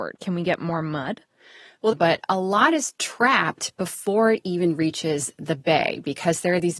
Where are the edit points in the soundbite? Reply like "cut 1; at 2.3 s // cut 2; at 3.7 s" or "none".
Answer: cut 1; at 1.9 s

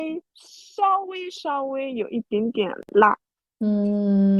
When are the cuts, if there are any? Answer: none

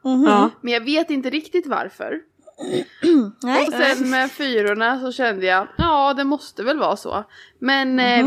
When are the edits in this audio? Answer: cut 1; at 3.7 s

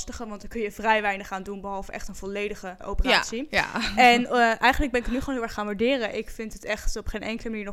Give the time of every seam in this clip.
cut 1; at 2.8 s

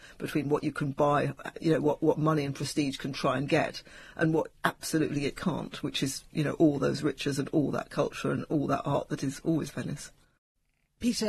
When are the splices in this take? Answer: none

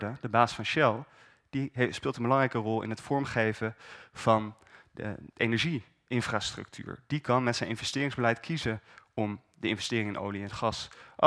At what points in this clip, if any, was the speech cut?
none

